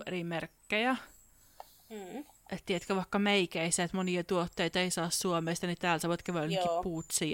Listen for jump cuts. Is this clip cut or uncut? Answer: uncut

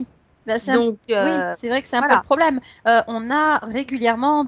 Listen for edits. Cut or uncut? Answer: uncut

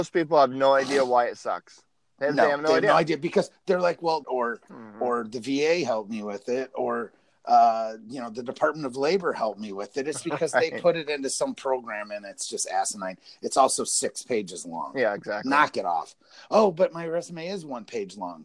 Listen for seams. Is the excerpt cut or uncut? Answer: cut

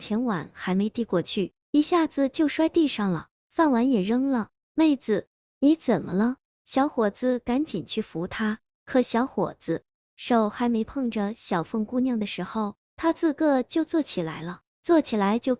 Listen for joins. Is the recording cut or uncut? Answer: uncut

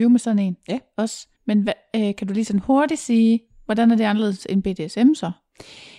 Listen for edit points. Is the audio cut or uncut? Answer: cut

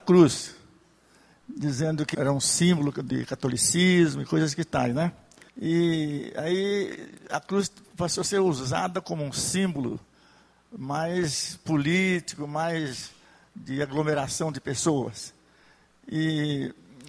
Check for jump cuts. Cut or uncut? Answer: cut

